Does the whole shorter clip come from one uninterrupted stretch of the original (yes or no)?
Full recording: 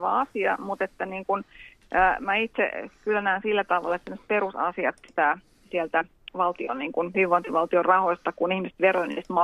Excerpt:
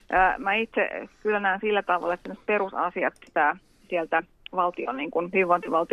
yes